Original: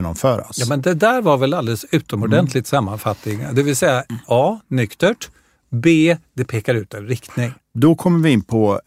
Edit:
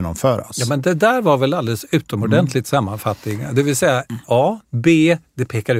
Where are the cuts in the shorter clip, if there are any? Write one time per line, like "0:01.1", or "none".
0:04.6

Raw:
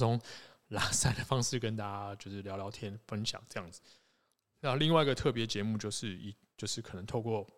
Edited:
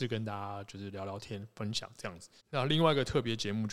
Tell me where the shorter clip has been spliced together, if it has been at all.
0:02.4

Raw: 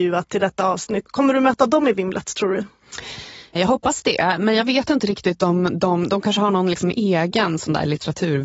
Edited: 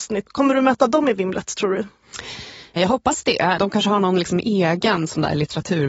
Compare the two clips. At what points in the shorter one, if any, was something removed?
0:03.6

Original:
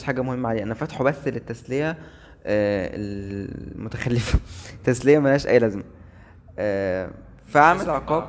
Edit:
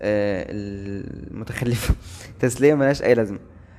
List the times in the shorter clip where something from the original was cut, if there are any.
none

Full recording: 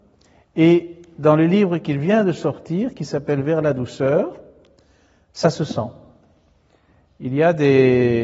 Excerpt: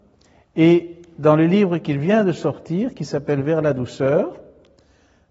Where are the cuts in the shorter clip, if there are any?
none

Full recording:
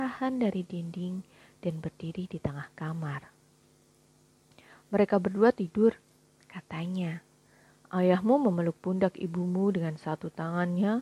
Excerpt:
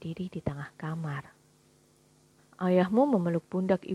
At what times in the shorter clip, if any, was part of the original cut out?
0:02.4

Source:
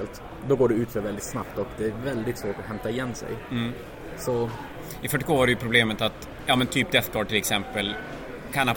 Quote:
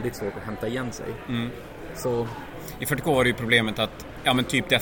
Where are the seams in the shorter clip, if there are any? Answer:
none

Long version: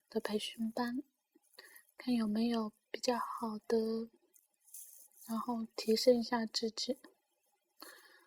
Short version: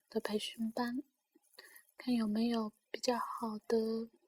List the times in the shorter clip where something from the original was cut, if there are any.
none

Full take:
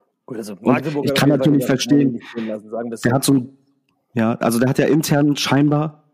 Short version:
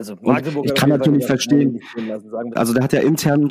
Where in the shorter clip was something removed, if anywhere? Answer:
0:02.5

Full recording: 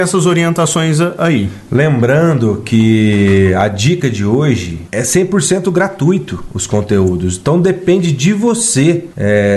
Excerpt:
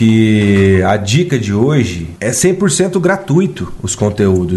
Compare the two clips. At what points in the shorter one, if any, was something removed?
none

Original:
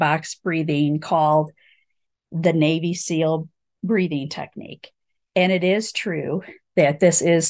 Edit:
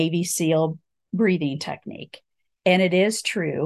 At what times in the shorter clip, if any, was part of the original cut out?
none

